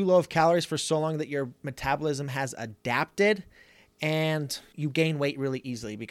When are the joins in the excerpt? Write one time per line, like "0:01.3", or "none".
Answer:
none